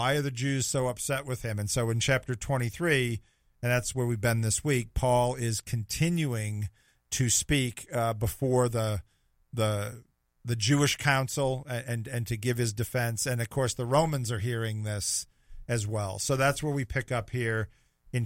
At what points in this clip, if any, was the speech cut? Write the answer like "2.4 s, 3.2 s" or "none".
none